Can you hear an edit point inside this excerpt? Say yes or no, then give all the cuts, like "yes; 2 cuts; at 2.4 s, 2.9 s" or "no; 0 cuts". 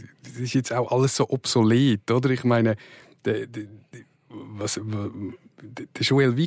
no; 0 cuts